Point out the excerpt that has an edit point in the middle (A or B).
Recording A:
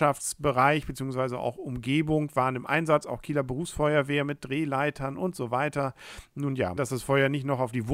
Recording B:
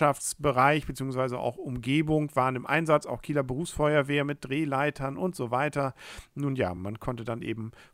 A